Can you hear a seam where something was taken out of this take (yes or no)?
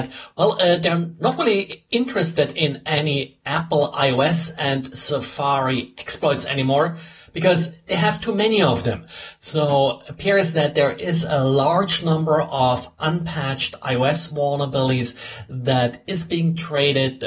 no